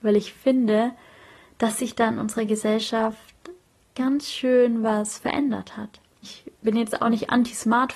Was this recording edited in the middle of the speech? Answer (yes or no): yes